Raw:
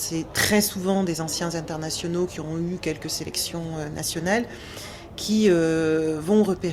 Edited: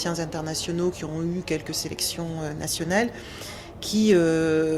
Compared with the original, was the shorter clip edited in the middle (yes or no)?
no